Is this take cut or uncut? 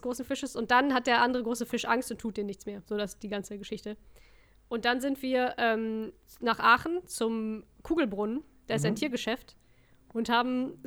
uncut